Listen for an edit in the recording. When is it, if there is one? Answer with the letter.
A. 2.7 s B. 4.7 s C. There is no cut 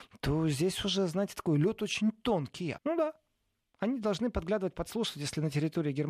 A